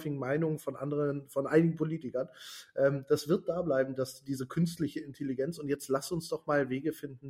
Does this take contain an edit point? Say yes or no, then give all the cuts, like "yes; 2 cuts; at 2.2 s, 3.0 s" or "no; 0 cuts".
no; 0 cuts